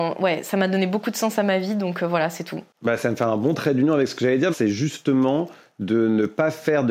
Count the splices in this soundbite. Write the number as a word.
one